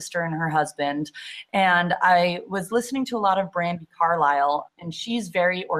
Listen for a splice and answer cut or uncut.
cut